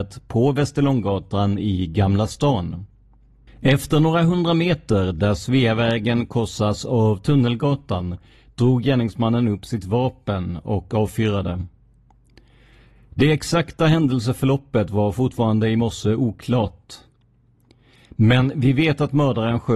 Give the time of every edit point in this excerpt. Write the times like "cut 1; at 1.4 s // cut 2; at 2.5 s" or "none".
cut 1; at 3.5 s